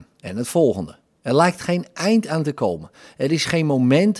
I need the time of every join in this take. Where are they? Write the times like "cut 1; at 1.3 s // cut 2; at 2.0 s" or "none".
none